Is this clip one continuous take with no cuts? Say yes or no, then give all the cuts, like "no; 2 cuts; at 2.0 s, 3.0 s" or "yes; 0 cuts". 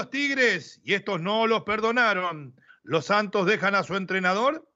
no; 1 cut; at 2.7 s